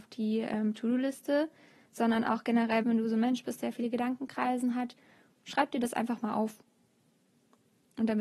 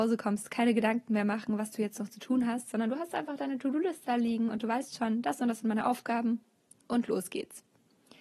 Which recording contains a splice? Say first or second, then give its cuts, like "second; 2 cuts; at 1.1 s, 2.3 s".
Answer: first; 1 cut; at 2.8 s